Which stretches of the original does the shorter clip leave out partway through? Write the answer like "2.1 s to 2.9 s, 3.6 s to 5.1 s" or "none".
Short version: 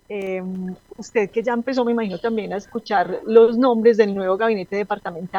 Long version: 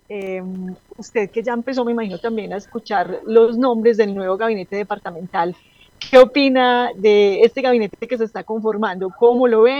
none